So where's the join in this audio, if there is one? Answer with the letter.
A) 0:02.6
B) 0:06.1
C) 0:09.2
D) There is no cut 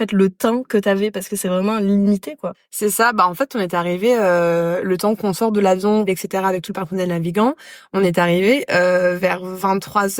B